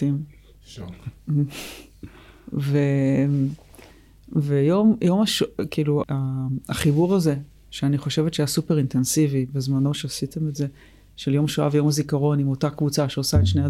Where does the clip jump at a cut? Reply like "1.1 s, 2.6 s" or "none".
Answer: 6.0 s